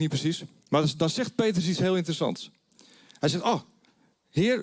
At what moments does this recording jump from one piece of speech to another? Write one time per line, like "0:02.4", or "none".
none